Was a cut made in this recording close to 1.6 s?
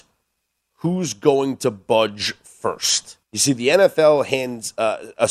no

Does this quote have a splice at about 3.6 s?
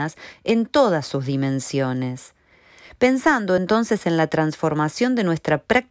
no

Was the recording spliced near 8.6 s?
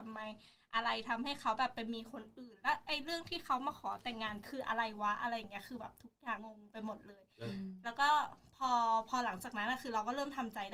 no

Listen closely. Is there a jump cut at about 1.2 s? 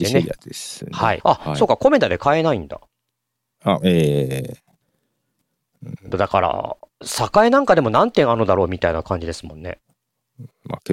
yes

